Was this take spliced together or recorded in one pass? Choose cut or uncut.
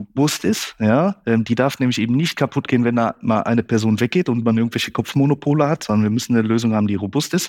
uncut